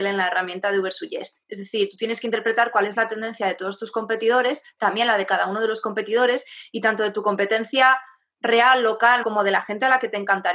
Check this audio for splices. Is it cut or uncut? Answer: cut